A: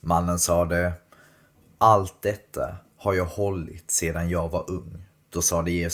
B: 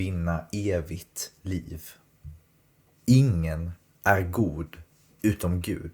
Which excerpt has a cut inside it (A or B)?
B